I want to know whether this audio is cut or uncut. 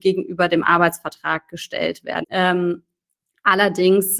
cut